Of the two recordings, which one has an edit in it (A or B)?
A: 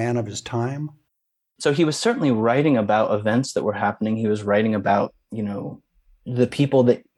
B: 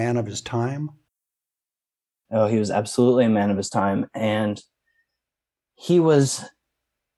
A